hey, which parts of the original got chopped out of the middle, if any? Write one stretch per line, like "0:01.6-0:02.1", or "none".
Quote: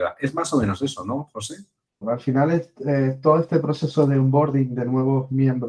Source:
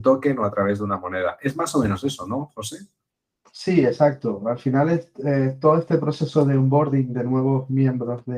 0:03.2-0:04.4